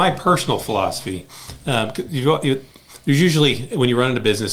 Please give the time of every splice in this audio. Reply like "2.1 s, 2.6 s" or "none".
none